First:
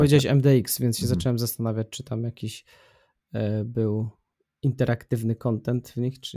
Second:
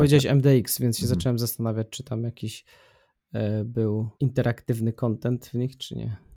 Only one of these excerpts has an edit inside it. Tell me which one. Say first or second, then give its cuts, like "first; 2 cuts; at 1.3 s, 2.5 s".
second; 1 cut; at 4.1 s